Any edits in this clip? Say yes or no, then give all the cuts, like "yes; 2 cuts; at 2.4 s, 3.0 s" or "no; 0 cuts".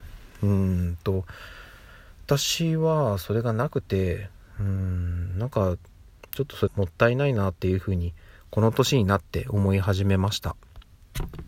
yes; 1 cut; at 6.7 s